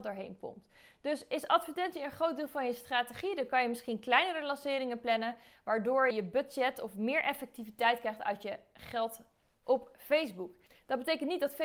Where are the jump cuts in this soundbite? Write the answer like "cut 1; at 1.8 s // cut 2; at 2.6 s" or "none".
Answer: cut 1; at 6.1 s